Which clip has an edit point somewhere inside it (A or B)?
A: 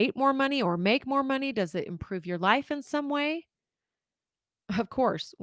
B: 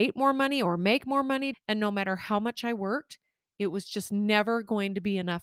B